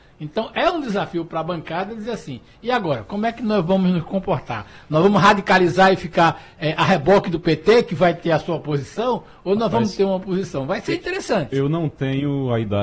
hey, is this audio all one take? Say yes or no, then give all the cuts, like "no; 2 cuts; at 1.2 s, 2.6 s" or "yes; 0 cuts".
yes; 0 cuts